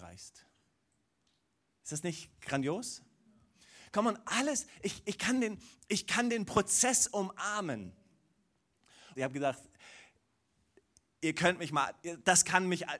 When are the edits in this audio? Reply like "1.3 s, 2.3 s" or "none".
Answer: 9.2 s